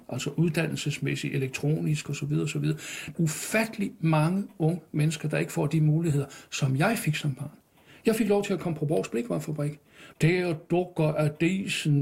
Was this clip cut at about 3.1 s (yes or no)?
yes